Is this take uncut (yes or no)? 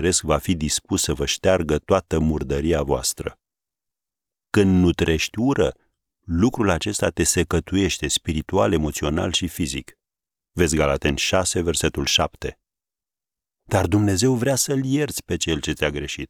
no